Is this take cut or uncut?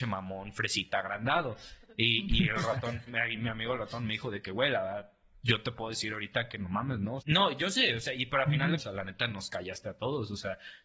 cut